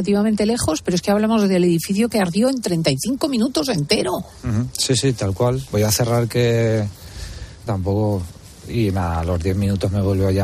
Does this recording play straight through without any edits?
no; 2 cuts; at 5.7 s, 7.7 s

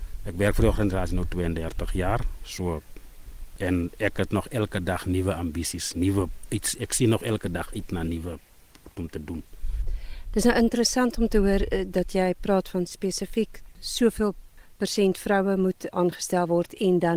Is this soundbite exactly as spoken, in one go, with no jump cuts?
yes; 0 cuts

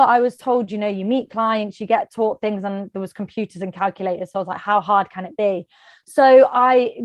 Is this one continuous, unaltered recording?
yes; 0 cuts

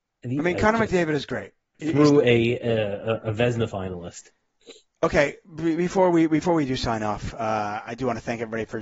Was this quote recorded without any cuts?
no; 1 cut; at 1.7 s

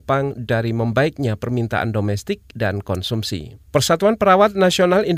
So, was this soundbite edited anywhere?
yes; 2 cuts; at 2.5 s, 3.7 s

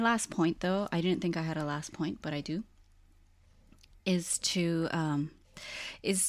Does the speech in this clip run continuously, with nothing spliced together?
yes; 0 cuts

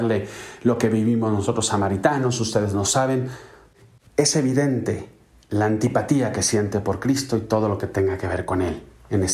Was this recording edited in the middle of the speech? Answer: no; 0 cuts

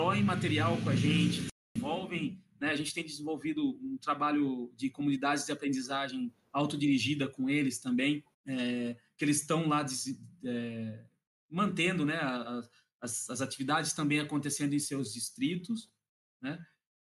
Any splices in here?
yes; 1 cut; at 8.3 s

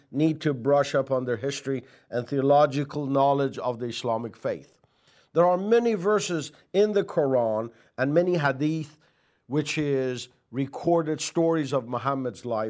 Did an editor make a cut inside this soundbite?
no; 0 cuts

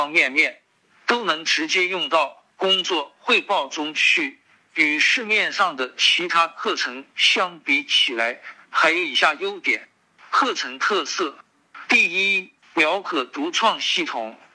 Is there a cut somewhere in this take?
yes; 2 cuts; at 4.6 s, 12.6 s

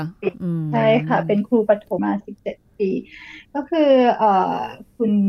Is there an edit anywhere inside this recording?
yes; 1 cut; at 2.0 s

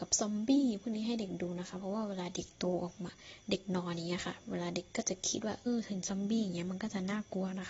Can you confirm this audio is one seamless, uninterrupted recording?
no; 1 cut; at 5.7 s

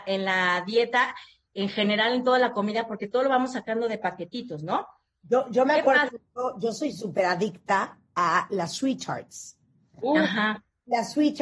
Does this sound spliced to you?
no; 0 cuts

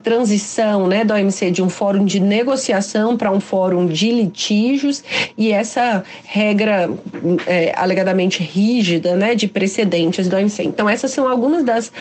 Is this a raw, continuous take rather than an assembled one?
yes; 0 cuts

